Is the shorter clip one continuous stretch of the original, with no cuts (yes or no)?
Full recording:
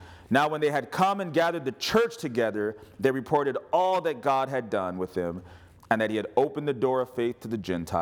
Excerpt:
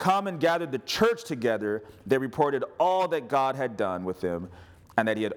yes